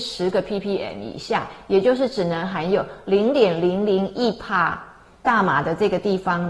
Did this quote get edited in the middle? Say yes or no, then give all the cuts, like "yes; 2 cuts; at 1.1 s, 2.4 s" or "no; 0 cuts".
yes; 1 cut; at 5.2 s